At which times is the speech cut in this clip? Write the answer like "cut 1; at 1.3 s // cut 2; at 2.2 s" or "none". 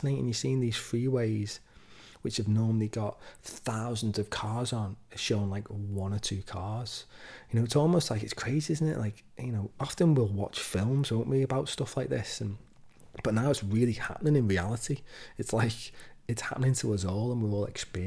none